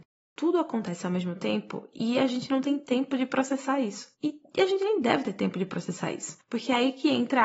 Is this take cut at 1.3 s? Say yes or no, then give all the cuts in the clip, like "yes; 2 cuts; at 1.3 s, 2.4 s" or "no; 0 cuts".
no; 1 cut; at 4.1 s